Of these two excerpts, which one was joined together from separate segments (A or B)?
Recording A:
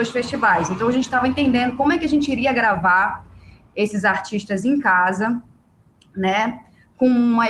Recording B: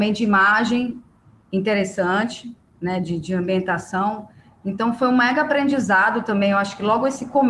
B